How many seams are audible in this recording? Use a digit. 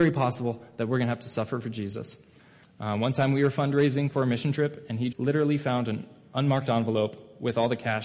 2